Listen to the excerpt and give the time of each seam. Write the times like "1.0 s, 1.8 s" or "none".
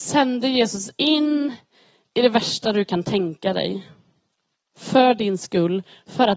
none